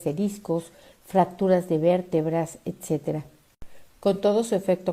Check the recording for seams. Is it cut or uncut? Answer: uncut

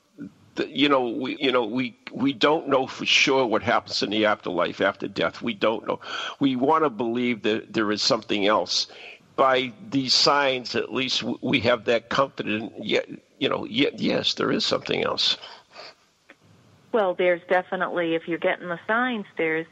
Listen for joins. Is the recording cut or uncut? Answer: cut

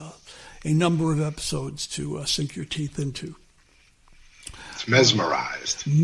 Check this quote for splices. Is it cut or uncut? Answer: uncut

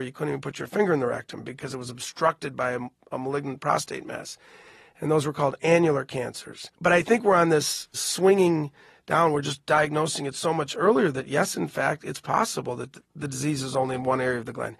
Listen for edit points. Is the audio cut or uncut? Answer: cut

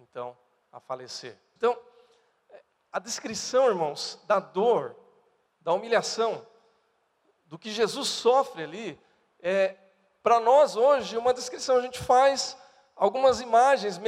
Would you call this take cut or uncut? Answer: cut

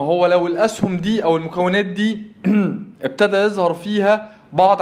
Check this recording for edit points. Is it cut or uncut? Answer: cut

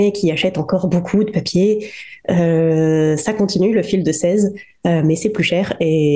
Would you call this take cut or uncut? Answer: uncut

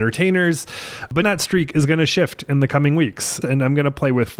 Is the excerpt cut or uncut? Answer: cut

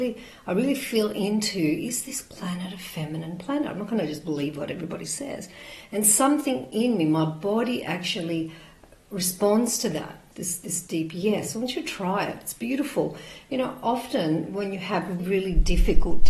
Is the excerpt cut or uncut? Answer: cut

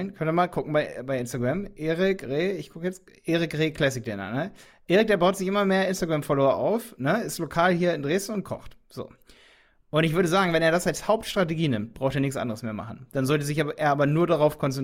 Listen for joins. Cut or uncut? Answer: uncut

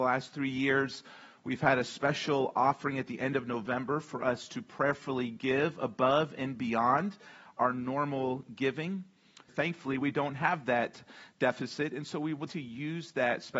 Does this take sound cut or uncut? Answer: cut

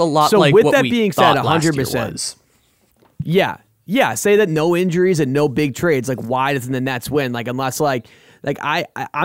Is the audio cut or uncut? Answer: uncut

